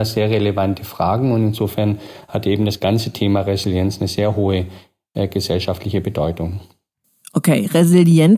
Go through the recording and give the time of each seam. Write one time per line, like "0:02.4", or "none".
none